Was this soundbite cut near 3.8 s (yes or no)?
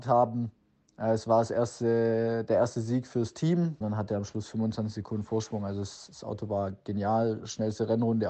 yes